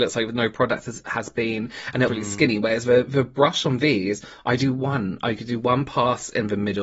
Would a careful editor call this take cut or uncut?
cut